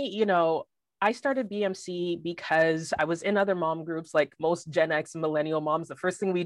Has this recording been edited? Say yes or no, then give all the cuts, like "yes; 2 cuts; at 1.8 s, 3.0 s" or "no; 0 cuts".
no; 0 cuts